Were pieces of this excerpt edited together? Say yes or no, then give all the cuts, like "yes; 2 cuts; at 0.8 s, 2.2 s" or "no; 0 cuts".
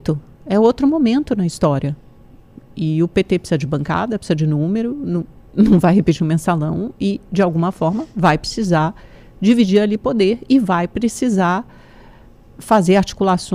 yes; 1 cut; at 5.5 s